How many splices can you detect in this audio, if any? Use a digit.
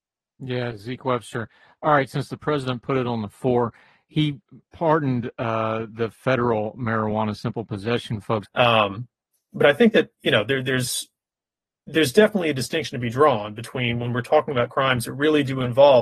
1